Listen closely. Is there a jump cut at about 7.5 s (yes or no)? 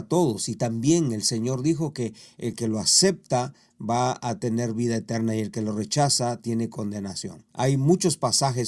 yes